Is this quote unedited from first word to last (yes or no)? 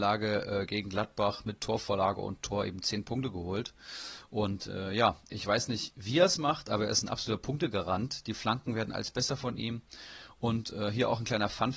yes